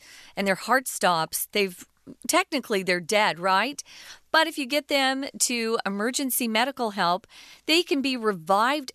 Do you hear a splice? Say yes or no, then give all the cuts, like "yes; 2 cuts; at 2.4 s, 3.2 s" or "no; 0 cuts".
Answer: no; 0 cuts